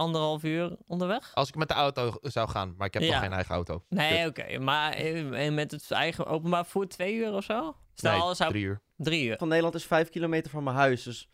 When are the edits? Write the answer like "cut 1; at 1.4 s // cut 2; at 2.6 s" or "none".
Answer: cut 1; at 7.8 s // cut 2; at 9.4 s